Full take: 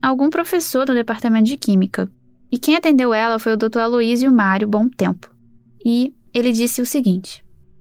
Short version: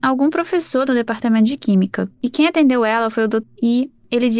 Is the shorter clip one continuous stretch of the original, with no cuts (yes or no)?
no